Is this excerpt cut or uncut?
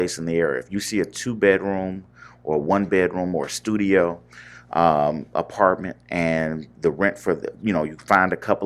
uncut